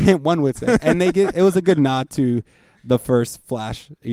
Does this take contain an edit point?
no; 0 cuts

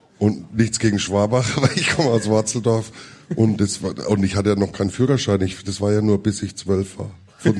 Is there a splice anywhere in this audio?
no; 0 cuts

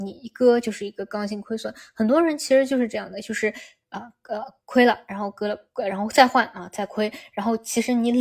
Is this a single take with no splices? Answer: yes; 0 cuts

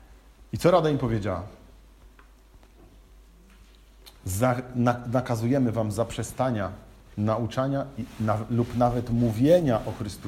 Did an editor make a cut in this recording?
no; 0 cuts

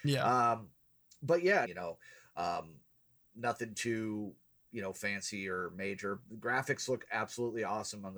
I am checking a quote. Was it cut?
yes; 1 cut; at 1.6 s

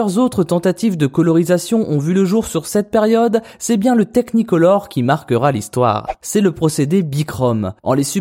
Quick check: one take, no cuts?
no; 1 cut; at 6.2 s

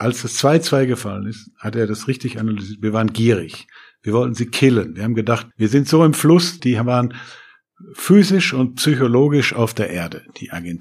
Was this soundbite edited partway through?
yes; 2 cuts; at 5.5 s, 6.6 s

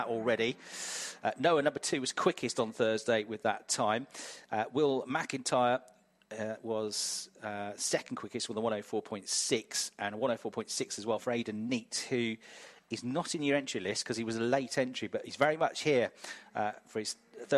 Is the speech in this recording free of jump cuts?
yes; 0 cuts

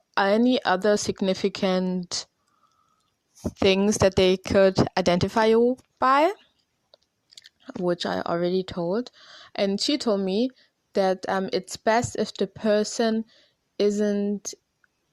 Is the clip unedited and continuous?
yes; 0 cuts

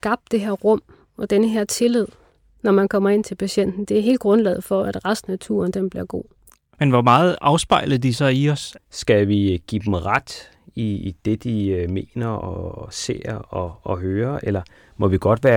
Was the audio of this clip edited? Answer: yes; 2 cuts; at 6.7 s, 8.8 s

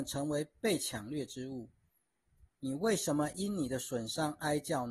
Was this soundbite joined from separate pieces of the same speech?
yes; 1 cut; at 2.5 s

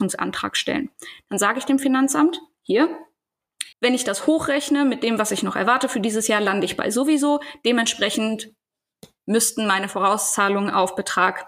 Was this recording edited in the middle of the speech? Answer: yes; 1 cut; at 3.7 s

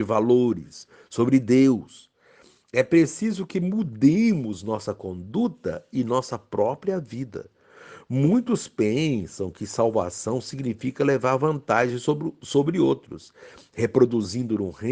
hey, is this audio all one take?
yes; 0 cuts

